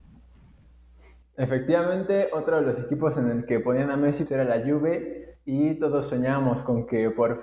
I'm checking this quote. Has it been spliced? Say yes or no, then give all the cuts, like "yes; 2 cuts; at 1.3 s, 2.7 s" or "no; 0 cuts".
yes; 1 cut; at 4.3 s